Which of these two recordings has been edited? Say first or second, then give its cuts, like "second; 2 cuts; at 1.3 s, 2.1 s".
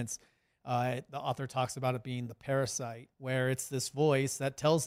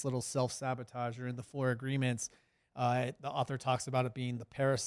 first; 1 cut; at 3.1 s